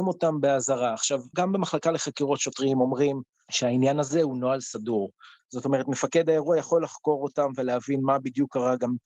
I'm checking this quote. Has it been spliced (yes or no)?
yes